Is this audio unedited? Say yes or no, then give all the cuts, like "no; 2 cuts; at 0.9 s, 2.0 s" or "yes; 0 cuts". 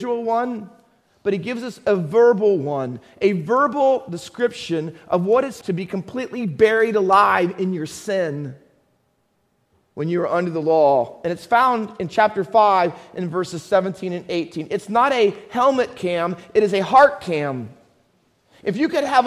no; 1 cut; at 5.6 s